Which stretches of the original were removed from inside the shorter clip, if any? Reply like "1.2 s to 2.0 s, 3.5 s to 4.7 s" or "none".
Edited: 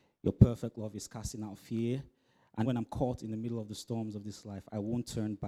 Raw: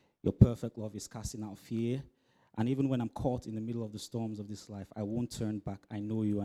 2.6 s to 2.9 s